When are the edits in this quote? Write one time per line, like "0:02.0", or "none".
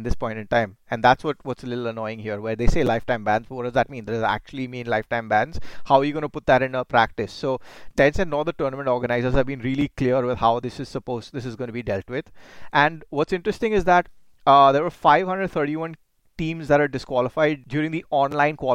none